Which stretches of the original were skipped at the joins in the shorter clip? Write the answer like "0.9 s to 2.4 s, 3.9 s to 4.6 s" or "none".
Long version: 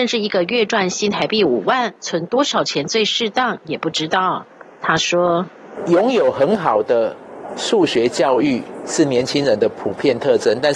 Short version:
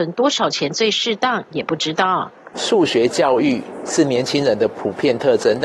4.7 s to 7.5 s